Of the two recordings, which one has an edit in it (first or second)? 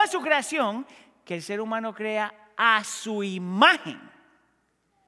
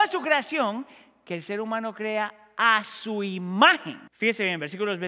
second